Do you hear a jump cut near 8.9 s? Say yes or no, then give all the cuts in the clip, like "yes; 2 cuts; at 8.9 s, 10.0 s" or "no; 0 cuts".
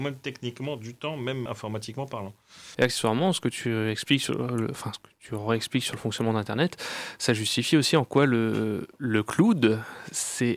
no; 2 cuts; at 1.5 s, 2.7 s